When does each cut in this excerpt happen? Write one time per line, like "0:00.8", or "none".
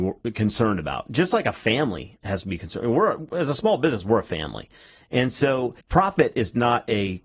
0:05.8